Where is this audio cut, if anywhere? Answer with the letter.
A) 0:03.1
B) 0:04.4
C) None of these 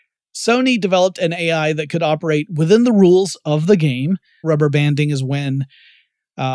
B